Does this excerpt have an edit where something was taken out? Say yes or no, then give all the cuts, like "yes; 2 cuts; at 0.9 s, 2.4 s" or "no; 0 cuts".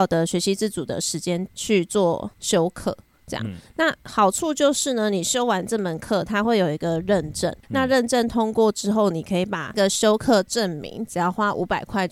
yes; 1 cut; at 7.6 s